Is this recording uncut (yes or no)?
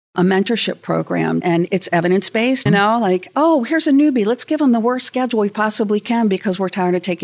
no